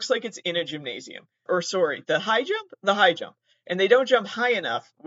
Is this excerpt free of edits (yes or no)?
no